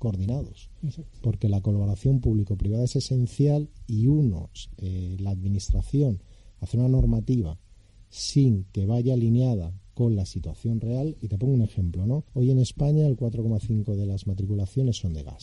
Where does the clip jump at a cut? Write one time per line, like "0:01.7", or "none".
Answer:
0:12.3